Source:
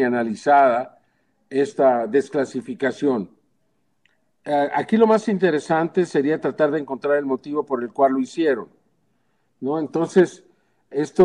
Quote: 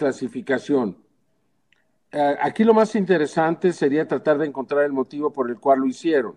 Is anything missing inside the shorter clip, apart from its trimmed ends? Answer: no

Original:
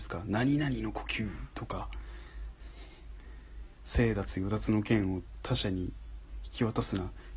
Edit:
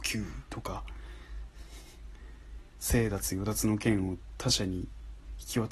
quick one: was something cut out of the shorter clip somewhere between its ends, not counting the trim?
no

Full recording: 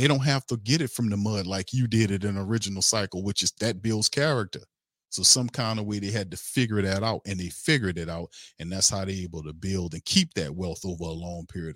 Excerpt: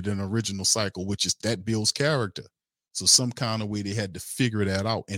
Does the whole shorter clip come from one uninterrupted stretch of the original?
yes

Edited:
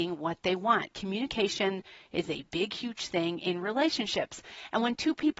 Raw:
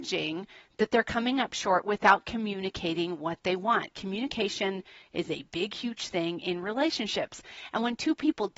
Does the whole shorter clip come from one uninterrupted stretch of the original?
yes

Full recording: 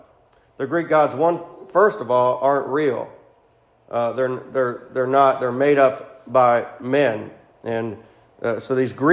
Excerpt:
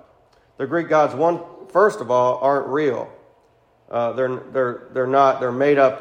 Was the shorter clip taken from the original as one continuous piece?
yes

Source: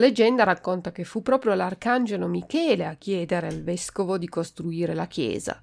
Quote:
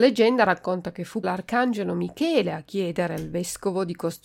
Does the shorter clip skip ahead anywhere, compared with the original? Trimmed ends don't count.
yes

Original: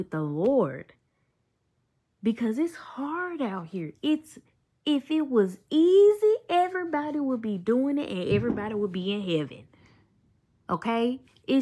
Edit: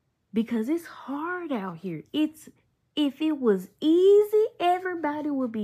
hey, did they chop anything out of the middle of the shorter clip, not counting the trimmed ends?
no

